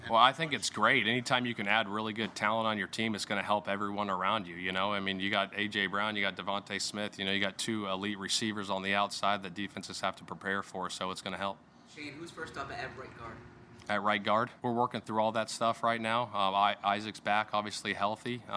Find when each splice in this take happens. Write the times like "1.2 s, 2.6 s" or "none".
14.6 s